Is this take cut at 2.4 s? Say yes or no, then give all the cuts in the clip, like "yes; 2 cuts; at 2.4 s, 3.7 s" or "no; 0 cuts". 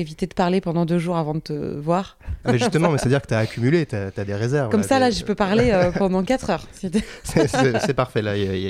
yes; 1 cut; at 2.4 s